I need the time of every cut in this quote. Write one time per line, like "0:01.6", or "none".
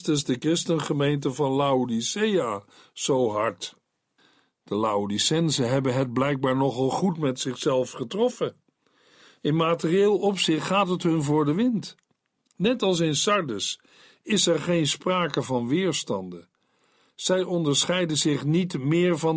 none